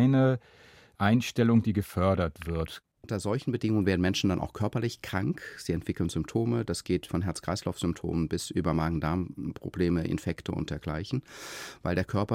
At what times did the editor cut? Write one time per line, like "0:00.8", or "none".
0:02.9
0:07.1